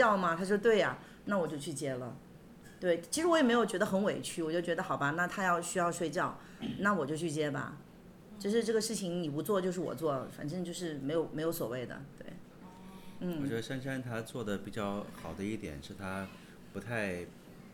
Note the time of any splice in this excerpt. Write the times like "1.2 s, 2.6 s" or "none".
none